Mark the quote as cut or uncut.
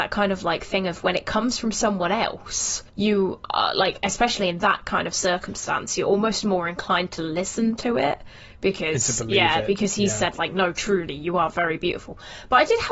cut